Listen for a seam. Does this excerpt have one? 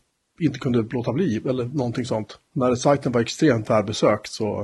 yes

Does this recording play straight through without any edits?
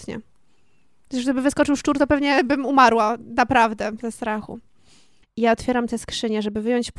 no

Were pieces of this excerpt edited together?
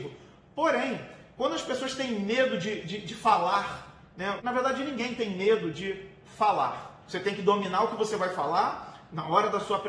yes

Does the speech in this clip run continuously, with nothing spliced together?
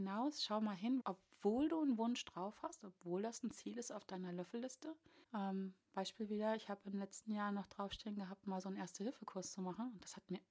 no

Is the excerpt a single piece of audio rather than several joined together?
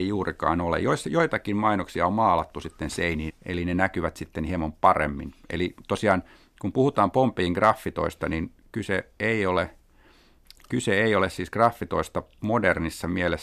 no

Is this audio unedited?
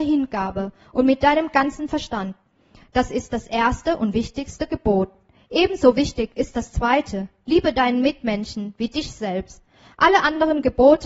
yes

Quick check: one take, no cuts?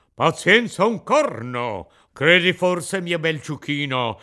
no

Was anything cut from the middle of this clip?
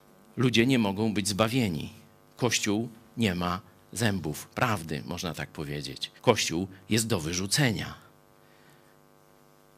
yes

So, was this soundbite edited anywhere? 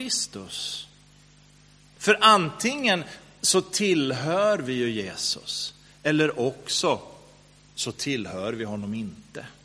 yes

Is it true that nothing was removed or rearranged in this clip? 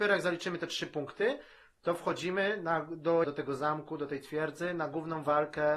no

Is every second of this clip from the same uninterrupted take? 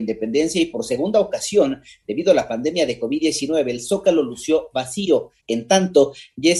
no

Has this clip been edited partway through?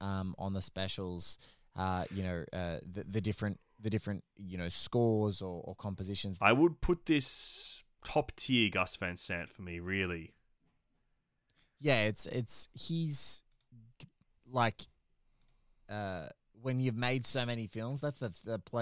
yes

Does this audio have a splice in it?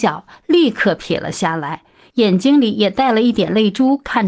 no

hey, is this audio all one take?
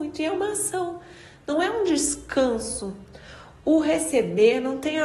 yes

